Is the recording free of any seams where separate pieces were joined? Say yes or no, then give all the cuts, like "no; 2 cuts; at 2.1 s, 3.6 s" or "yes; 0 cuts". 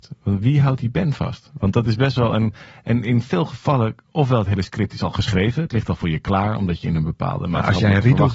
yes; 0 cuts